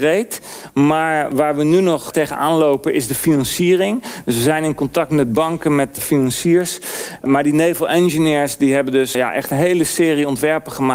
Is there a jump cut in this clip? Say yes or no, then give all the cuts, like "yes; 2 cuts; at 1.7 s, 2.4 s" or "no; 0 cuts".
yes; 2 cuts; at 7.2 s, 9.1 s